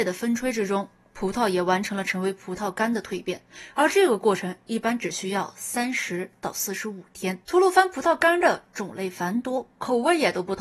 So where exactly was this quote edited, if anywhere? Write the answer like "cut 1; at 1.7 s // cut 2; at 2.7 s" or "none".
cut 1; at 7.4 s